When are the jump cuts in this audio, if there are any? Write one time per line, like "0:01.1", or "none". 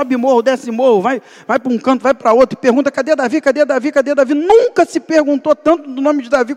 none